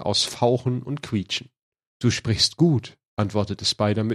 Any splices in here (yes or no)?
yes